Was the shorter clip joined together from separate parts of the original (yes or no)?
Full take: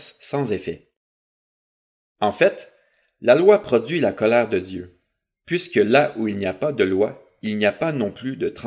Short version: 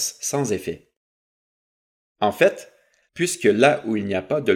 yes